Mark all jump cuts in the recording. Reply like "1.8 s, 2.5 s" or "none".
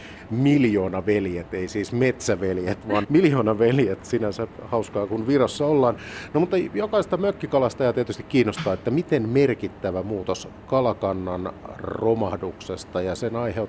3.0 s